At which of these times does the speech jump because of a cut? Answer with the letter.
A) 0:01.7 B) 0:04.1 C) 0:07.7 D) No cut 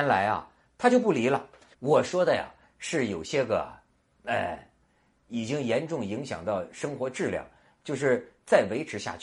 A